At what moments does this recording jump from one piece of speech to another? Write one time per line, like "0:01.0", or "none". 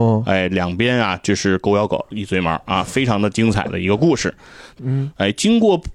0:04.8